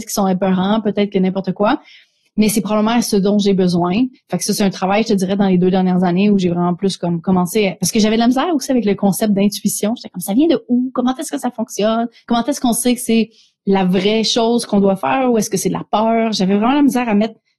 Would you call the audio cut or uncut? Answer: cut